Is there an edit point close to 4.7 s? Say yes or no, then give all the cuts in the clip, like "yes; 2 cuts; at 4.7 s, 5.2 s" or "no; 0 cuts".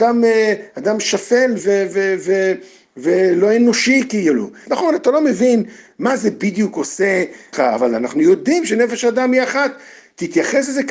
yes; 3 cuts; at 1.6 s, 4.7 s, 7.5 s